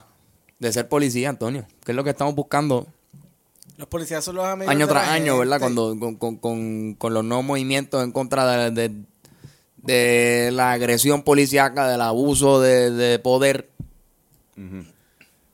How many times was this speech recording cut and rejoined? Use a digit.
0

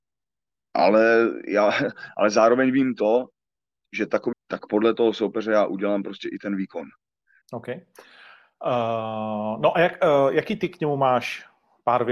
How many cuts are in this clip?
2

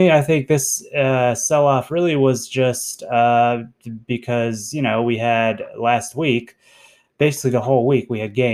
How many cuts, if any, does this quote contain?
0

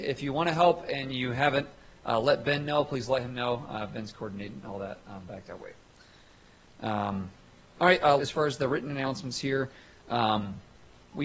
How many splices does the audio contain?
1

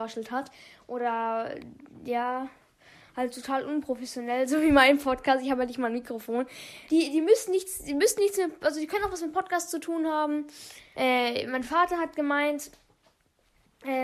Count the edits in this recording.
2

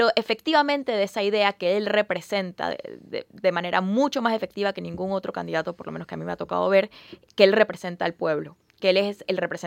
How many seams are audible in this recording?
0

